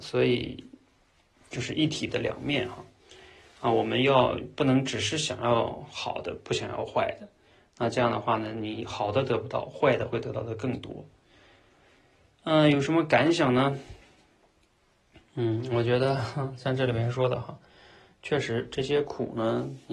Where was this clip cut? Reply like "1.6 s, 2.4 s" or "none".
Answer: none

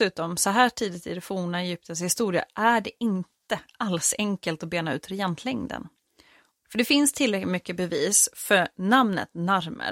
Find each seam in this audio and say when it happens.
6.5 s

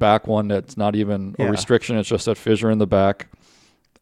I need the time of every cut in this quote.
none

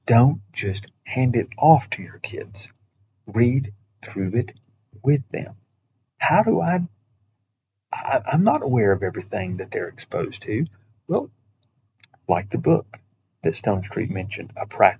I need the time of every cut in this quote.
6.1 s

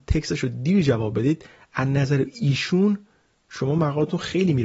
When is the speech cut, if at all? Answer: none

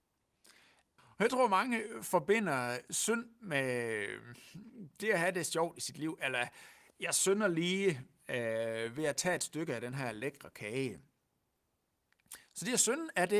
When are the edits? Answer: 1.0 s

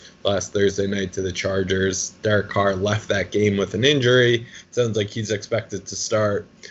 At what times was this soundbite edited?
4.6 s

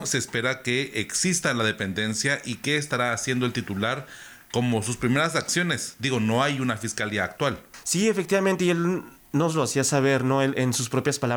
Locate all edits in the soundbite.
none

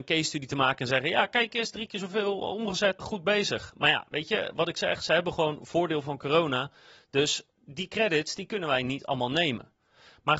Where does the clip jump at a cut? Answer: 3.0 s

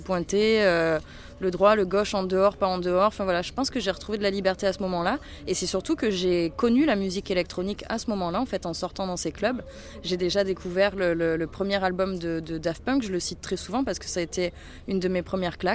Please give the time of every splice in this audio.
none

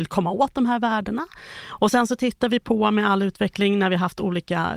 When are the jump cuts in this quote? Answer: 1.6 s

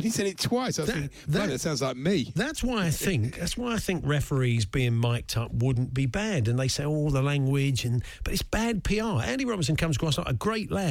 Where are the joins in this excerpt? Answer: none

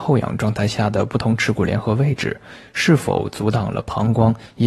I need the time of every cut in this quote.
none

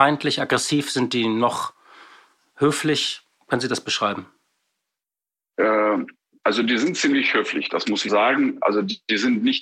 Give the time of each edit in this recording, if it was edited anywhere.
8.1 s

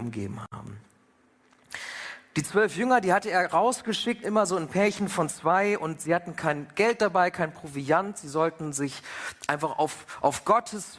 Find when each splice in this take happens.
2.3 s, 4.2 s

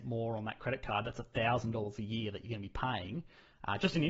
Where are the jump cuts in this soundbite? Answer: none

